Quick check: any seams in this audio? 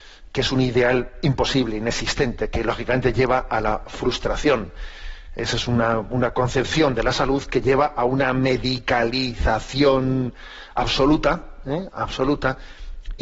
no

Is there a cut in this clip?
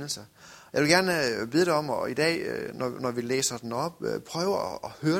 no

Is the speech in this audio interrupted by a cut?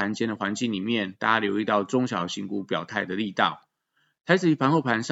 no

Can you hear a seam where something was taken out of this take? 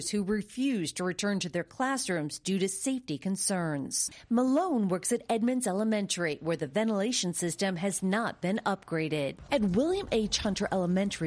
no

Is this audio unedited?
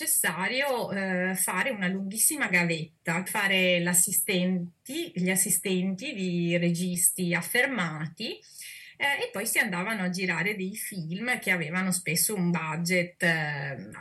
no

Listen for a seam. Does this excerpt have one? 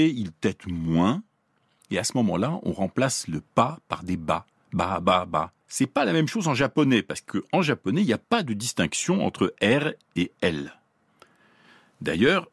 yes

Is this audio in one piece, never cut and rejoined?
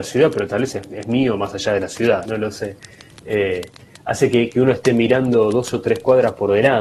no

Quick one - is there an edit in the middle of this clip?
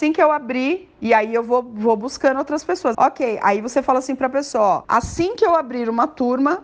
yes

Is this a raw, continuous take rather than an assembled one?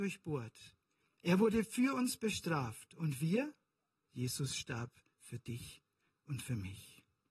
no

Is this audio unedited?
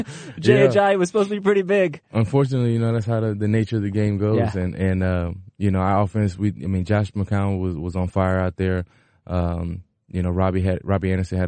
yes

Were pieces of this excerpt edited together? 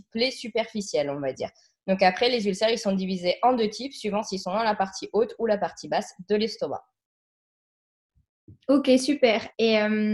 no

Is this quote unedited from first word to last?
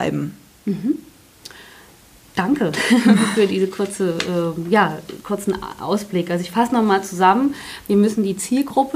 yes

